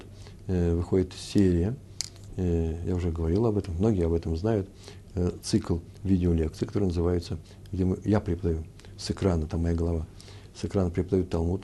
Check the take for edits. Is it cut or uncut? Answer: uncut